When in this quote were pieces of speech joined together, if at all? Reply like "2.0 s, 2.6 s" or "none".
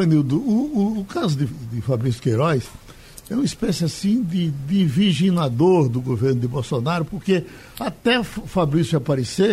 1.5 s